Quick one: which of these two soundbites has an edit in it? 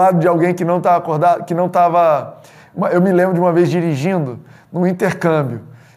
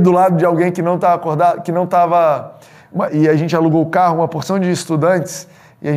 second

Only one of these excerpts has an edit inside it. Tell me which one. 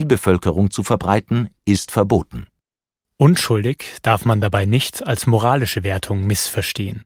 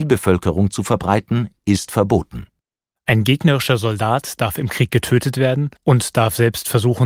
second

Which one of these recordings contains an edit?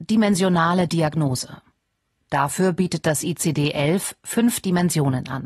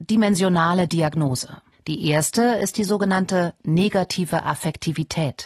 second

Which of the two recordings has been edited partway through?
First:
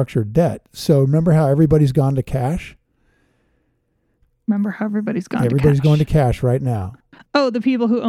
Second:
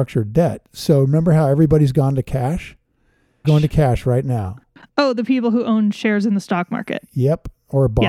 second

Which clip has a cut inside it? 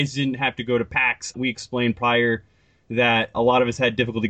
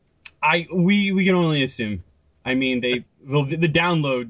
first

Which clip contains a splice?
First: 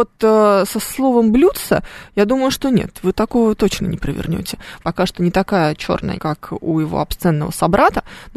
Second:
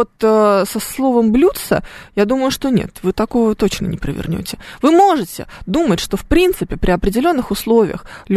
first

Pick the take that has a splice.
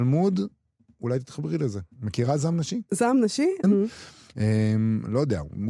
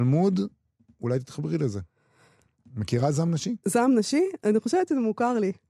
first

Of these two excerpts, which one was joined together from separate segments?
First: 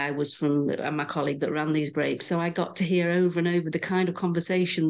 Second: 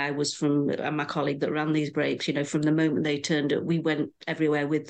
first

